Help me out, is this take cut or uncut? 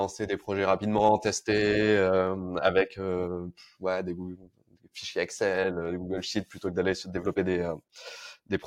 uncut